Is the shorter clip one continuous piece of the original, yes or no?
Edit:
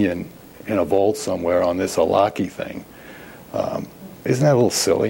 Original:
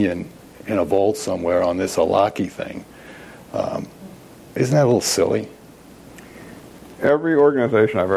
no